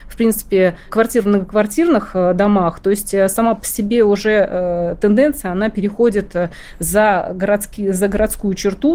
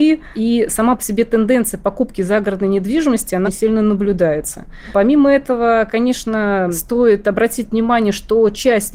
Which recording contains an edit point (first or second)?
second